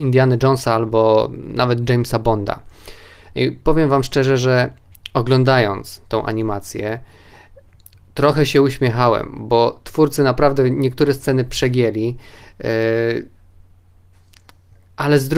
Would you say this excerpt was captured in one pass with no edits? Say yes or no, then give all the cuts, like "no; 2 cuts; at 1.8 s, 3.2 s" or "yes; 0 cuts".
yes; 0 cuts